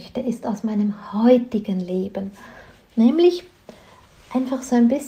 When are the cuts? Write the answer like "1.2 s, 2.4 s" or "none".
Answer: none